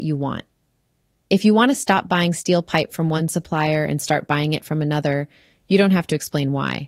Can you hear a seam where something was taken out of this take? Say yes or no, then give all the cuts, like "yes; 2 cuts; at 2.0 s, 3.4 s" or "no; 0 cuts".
no; 0 cuts